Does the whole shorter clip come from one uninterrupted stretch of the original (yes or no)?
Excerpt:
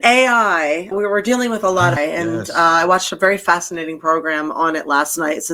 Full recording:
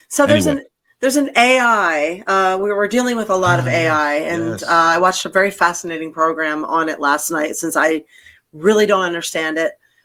no